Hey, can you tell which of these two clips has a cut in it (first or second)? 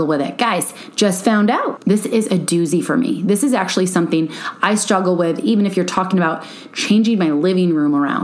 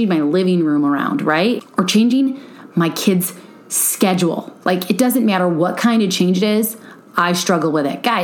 first